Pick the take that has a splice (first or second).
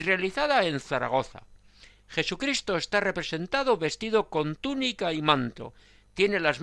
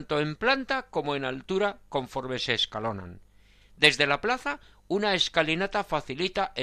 second